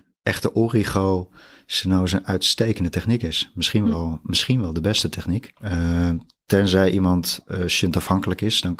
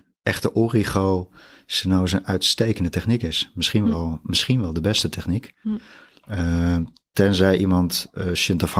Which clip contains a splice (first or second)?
first